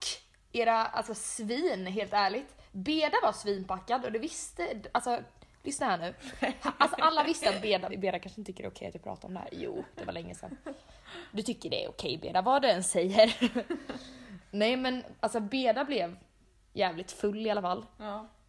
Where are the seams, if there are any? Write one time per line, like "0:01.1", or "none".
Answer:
0:07.9

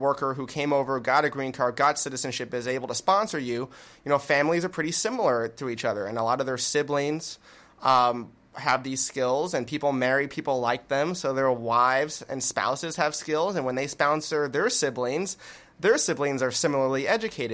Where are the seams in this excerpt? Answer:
none

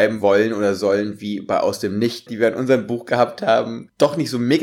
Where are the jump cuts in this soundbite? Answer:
0:02.3

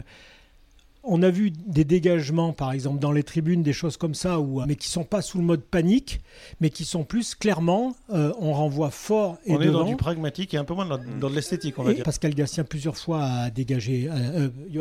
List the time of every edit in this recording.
0:04.6
0:12.0

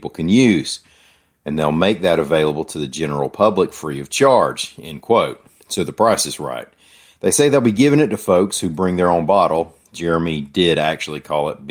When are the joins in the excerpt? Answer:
none

